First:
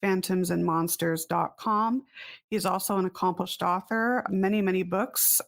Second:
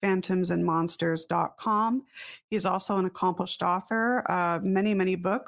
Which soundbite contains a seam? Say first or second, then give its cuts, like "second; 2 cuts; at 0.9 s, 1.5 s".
first; 1 cut; at 4.3 s